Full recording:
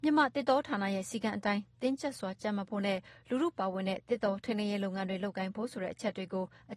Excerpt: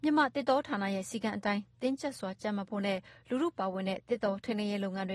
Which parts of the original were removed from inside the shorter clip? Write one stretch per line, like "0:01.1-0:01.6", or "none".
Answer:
none